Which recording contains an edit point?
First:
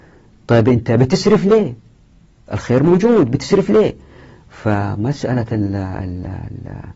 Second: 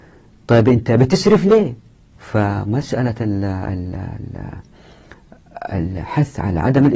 second; 1 cut; at 2.1 s

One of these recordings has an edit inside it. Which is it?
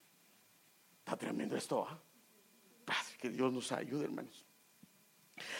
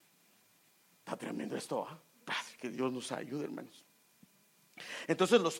second; 1 cut; at 2.2 s

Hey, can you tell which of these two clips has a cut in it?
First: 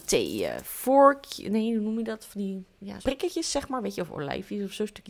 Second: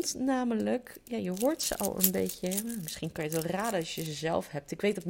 first; 1 cut; at 3.0 s

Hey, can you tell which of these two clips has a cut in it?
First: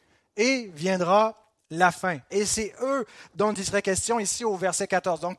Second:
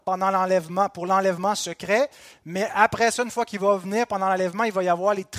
first; 1 cut; at 2.3 s

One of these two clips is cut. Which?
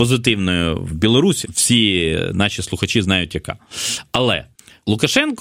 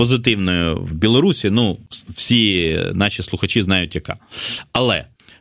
first; 1 cut; at 1.4 s

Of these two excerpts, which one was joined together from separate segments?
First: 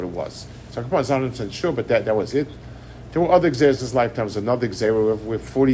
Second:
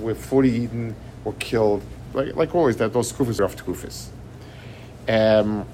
second; 2 cuts; at 2.1 s, 3.4 s

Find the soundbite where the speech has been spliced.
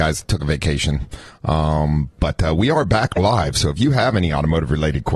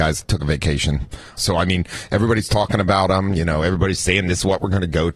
second; 1 cut; at 1.4 s

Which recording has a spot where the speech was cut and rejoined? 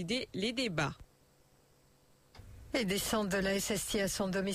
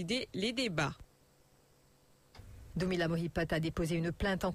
second; 1 cut; at 2.7 s

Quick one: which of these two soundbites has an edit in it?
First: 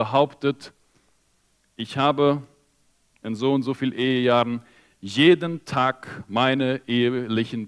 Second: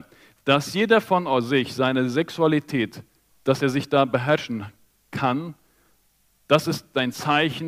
second; 1 cut; at 3.3 s

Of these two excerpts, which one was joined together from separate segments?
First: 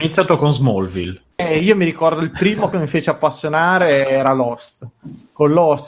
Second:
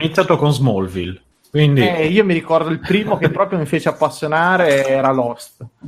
first; 2 cuts; at 1.4 s, 2.7 s

